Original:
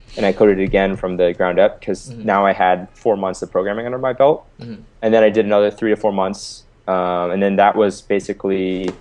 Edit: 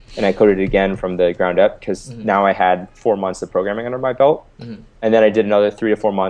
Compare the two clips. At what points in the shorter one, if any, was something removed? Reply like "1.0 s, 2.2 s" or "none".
none